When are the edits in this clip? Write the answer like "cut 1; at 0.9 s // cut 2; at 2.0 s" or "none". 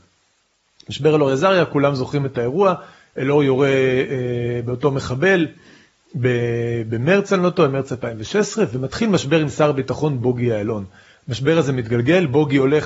none